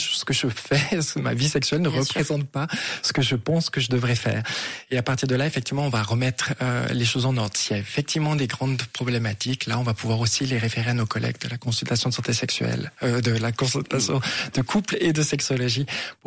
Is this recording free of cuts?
yes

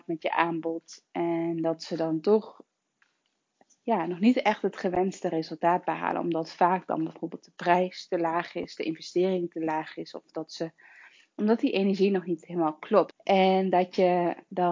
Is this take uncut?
no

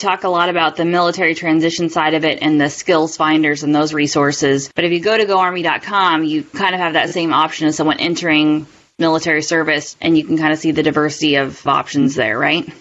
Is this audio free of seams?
no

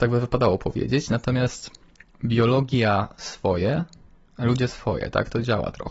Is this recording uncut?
yes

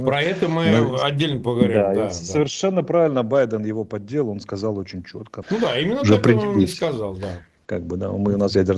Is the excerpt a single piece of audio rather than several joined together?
no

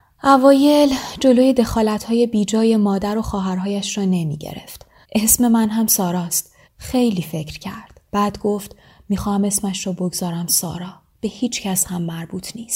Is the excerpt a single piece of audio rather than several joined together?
no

